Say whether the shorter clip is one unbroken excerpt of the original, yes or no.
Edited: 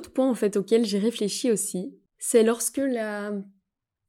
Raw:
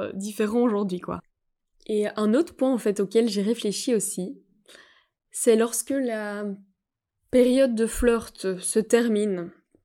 no